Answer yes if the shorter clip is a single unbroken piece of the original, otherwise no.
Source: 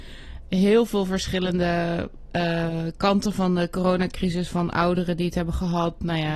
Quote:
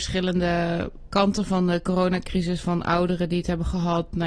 no